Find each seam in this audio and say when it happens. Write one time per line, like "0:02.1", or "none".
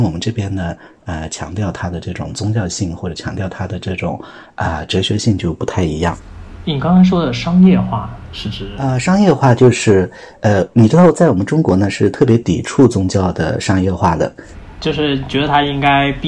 none